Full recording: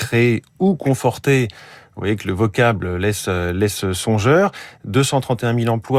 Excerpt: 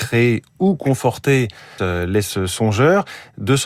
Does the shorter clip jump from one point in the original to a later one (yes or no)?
yes